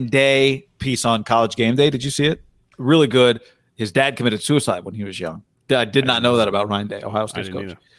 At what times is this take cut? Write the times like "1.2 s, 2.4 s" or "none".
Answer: 2.7 s